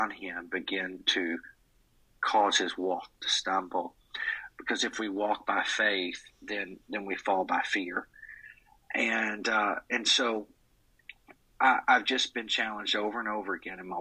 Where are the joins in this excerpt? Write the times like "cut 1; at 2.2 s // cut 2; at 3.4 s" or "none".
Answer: none